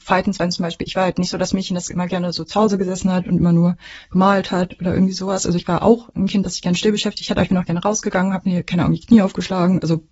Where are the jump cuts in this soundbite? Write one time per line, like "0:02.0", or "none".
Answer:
none